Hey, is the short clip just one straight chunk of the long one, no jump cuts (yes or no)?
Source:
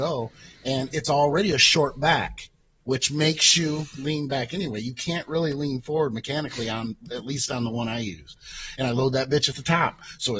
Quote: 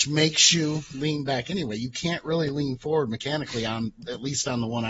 yes